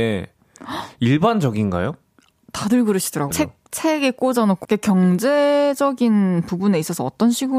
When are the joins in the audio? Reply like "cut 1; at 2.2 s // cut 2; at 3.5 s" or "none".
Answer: cut 1; at 3.3 s // cut 2; at 4.6 s